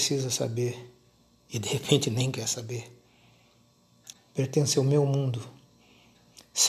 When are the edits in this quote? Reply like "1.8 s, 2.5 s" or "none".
4.1 s